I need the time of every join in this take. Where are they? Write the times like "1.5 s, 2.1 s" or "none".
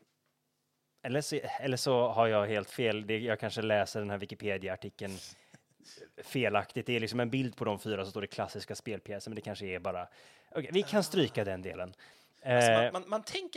none